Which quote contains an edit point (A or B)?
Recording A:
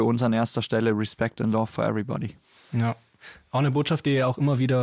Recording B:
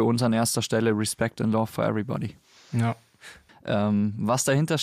B